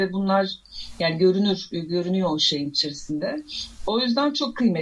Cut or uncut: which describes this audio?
uncut